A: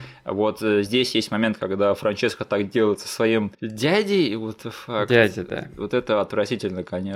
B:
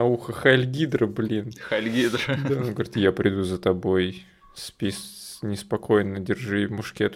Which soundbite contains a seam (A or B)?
A